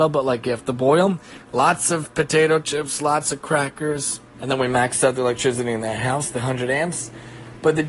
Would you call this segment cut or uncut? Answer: cut